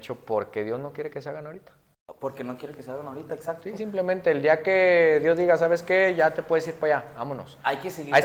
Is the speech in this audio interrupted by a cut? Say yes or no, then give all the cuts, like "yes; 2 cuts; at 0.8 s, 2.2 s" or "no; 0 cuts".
no; 0 cuts